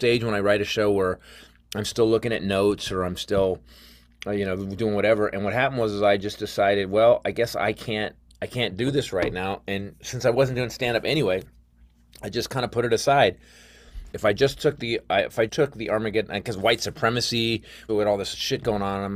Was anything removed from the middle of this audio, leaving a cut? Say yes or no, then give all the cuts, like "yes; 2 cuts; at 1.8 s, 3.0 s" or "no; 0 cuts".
yes; 3 cuts; at 14.1 s, 15.5 s, 17.9 s